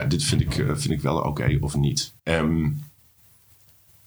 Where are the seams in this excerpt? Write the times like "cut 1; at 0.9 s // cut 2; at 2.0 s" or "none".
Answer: cut 1; at 2.2 s

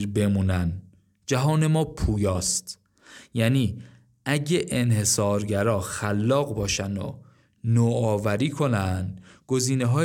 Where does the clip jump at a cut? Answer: none

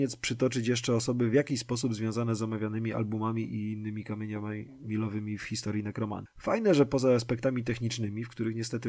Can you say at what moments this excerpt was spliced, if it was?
cut 1; at 6.3 s

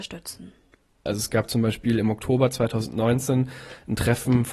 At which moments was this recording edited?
cut 1; at 1.1 s

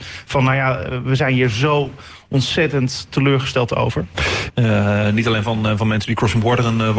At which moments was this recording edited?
cut 1; at 4.5 s

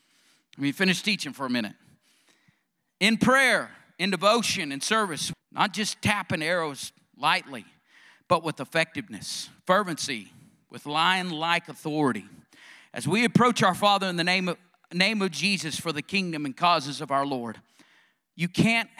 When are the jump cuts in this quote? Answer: cut 1; at 5.3 s

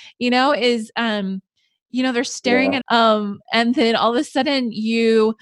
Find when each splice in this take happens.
cut 1; at 2.8 s

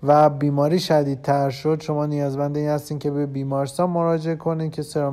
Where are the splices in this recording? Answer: none

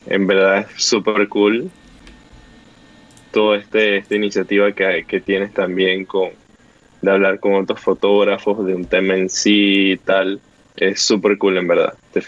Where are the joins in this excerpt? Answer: none

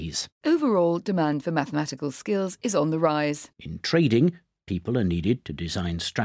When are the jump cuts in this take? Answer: none

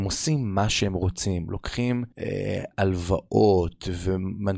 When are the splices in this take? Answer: cut 1; at 2.1 s

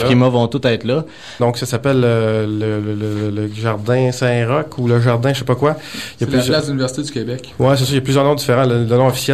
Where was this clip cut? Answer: cut 1; at 1.4 s

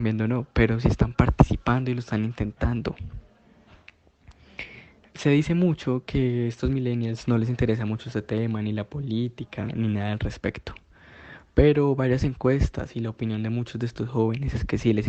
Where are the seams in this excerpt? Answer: none

